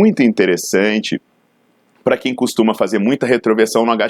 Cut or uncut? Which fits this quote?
uncut